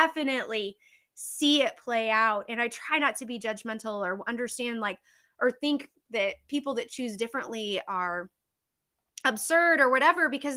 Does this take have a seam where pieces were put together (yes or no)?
no